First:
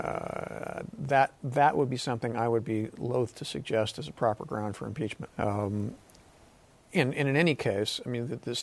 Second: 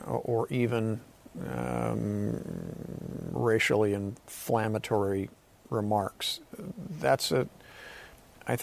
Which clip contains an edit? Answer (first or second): first